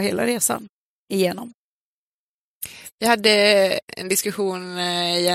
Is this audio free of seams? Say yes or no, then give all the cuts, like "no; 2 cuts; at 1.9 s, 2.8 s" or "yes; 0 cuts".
yes; 0 cuts